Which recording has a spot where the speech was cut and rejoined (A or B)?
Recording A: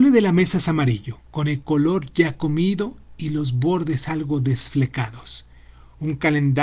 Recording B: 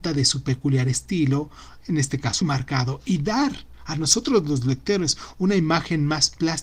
B